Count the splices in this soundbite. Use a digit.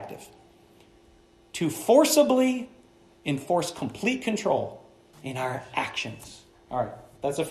1